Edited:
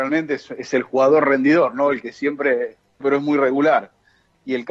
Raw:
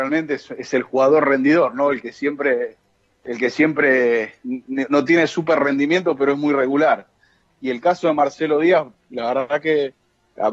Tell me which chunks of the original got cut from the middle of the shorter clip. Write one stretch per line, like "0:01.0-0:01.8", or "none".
0:03.0-0:06.2